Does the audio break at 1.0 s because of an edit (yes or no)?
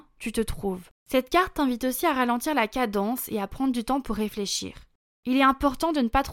yes